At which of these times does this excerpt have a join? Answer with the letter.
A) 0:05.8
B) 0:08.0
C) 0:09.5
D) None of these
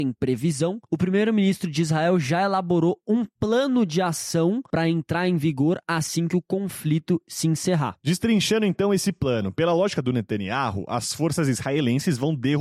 D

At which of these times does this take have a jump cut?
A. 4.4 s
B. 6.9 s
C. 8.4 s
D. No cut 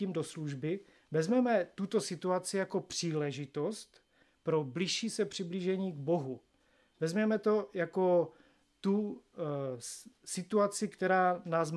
D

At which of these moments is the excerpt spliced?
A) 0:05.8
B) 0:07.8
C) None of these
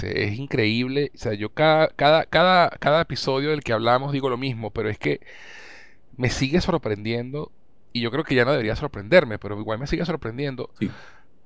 C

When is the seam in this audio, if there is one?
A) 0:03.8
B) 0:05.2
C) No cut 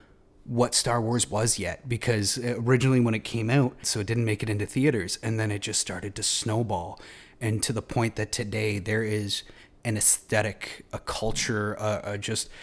A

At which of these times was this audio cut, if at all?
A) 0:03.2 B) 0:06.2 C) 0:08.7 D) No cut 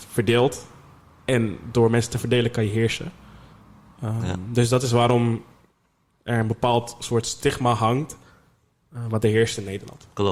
D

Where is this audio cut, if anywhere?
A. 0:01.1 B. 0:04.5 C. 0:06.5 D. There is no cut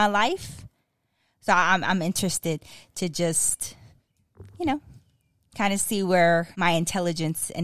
C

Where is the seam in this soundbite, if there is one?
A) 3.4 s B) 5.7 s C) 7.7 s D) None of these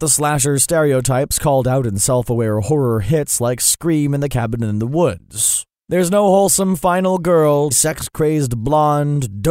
C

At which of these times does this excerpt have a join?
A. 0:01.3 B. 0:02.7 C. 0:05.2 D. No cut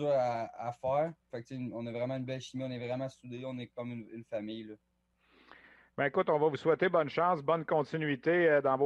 A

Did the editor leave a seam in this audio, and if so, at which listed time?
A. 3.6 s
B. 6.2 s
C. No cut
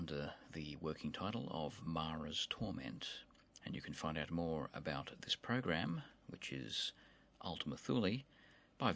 A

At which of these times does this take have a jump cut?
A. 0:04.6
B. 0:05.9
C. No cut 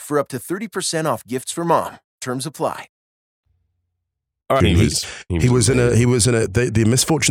A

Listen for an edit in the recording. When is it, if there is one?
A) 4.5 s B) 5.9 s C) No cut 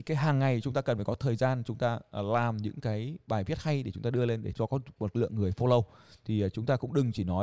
A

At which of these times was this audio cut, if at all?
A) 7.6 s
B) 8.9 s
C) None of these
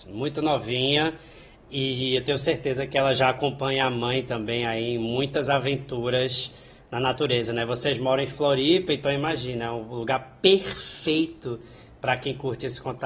C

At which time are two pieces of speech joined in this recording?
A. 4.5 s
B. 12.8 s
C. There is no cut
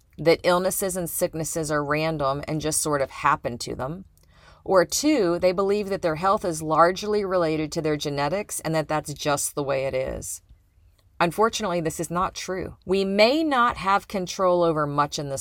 B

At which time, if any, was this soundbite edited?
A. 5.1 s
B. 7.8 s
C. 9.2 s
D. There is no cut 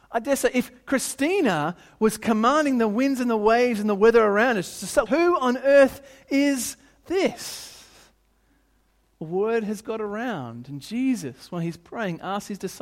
A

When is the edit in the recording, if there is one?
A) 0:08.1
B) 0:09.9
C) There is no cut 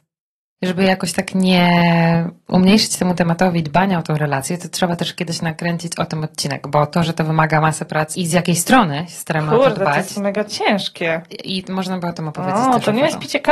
A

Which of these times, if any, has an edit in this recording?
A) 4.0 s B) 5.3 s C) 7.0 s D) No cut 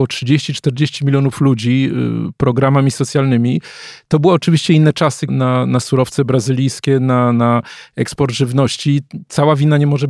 B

